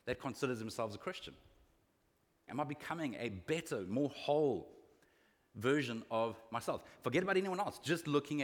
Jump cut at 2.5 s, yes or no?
yes